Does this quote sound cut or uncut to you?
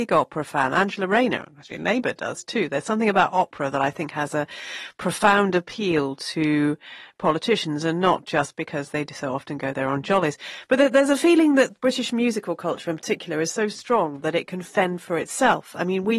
uncut